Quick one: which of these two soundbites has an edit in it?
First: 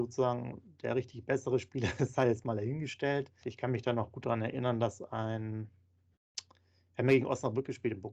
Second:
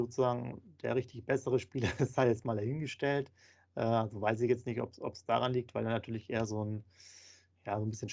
first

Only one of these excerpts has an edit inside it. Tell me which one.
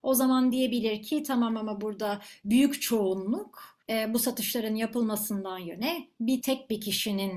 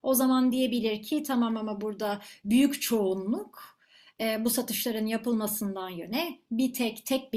first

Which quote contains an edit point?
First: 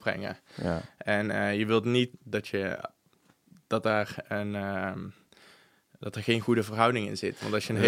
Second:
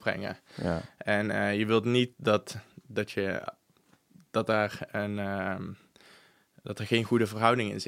first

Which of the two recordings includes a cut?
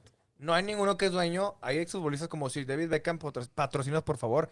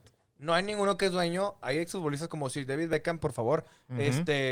second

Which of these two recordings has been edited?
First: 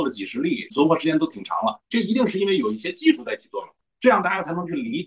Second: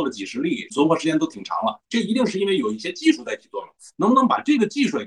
first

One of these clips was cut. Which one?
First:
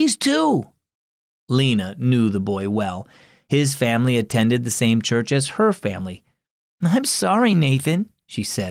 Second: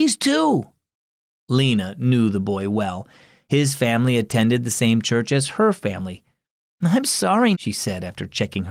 second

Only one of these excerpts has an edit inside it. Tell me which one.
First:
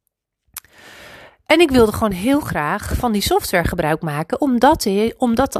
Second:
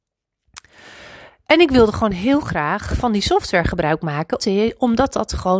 second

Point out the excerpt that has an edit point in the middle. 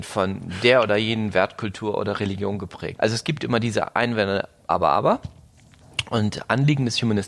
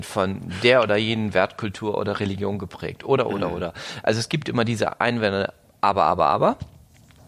first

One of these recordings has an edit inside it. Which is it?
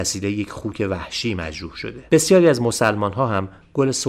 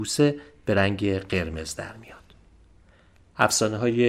first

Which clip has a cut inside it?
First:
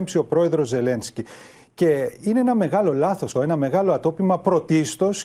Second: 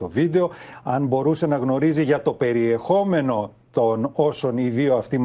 first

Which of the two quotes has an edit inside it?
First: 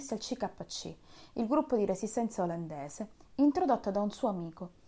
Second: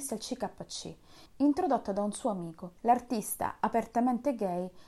second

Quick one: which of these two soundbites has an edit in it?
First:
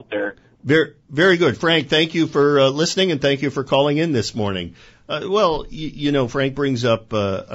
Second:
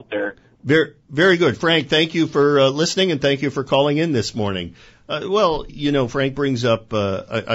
second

